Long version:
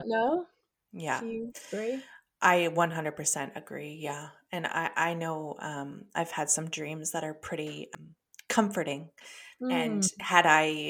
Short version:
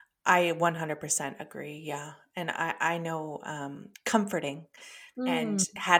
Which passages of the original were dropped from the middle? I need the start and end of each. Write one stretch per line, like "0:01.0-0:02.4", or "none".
0:06.1-0:08.4